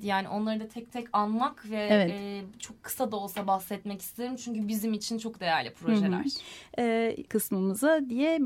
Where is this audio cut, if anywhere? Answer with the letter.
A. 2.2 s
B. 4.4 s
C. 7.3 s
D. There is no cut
C